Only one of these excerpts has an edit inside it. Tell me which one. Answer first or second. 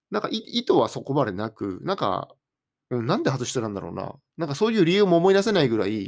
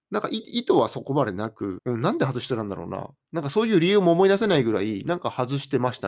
second